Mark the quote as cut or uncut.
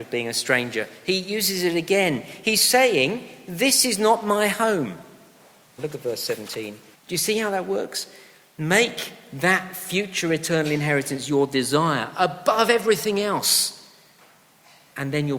cut